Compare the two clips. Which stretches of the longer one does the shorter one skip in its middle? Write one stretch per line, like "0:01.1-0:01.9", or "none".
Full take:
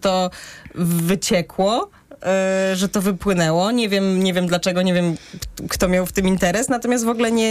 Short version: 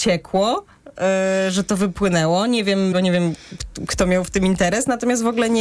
0:04.2-0:04.7